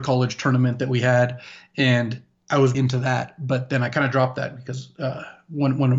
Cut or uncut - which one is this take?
cut